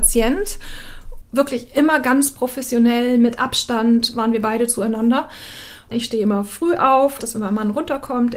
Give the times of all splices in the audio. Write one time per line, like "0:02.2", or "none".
0:01.2
0:05.9
0:07.2